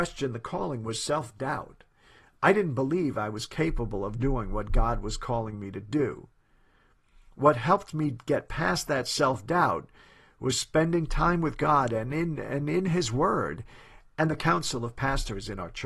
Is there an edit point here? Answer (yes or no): no